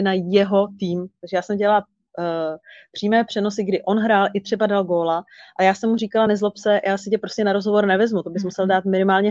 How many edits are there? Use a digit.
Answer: 0